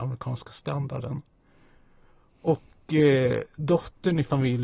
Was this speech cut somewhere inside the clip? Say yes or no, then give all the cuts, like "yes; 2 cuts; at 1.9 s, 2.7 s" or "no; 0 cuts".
no; 0 cuts